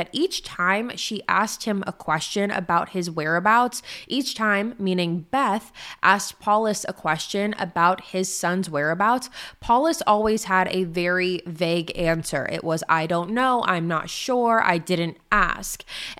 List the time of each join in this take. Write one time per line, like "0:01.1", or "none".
none